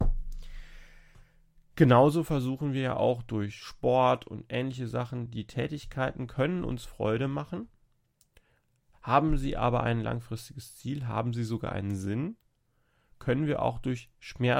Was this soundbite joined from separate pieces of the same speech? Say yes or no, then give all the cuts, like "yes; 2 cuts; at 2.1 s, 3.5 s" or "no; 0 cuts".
no; 0 cuts